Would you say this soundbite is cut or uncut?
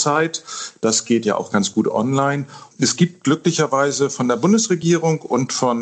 cut